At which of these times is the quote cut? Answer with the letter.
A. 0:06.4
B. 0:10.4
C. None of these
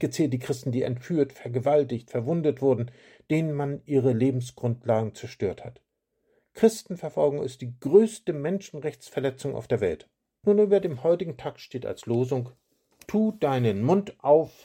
B